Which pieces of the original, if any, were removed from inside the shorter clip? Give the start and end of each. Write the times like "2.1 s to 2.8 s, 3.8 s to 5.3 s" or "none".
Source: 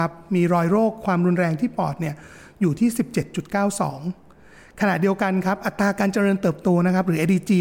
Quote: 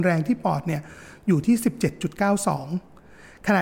none